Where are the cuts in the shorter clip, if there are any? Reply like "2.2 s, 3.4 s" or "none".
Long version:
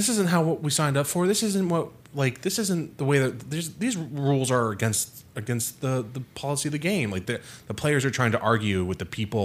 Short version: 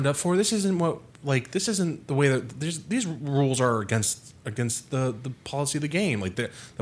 none

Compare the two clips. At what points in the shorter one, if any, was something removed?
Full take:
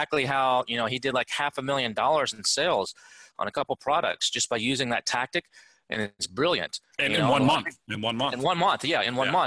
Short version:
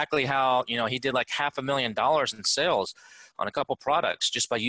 none

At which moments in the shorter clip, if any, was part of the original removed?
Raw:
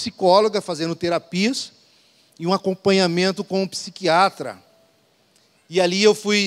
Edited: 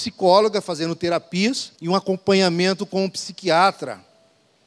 1.7 s

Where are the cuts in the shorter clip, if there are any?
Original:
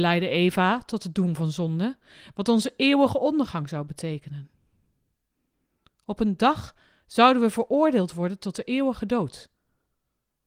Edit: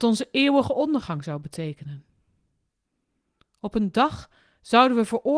none

